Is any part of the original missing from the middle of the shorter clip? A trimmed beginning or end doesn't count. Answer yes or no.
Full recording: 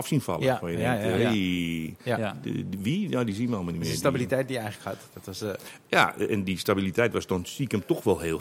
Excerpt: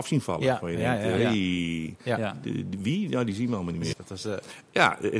yes